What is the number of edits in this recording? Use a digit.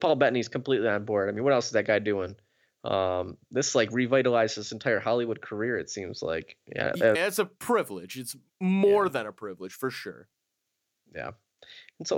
1